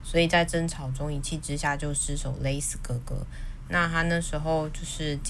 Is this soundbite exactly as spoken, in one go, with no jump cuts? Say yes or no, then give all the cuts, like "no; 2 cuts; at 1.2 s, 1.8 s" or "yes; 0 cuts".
no; 1 cut; at 3.7 s